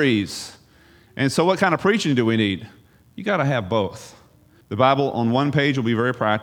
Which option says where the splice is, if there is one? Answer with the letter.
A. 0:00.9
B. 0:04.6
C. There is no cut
B